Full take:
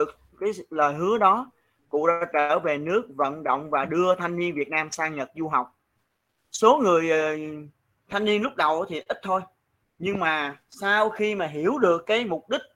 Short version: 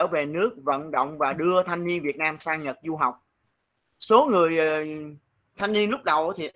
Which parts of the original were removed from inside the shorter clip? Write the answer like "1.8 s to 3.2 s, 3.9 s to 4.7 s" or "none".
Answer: none

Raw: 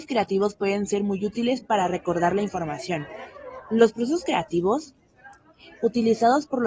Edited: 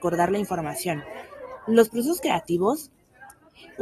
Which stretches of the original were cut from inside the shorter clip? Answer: none

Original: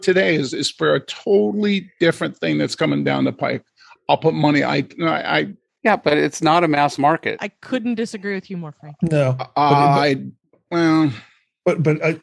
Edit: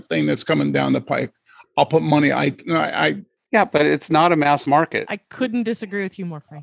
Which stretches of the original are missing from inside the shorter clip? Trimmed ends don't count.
none

